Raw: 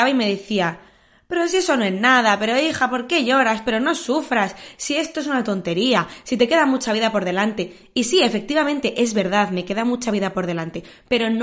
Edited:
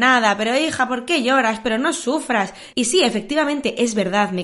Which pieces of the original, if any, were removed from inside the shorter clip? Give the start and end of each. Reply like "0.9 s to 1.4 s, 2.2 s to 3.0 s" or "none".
4.7 s to 7.9 s